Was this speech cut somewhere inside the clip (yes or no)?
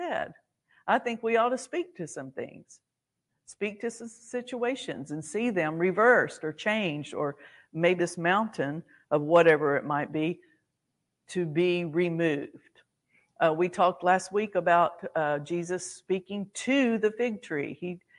yes